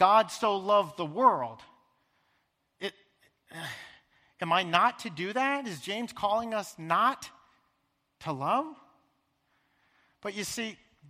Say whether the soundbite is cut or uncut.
uncut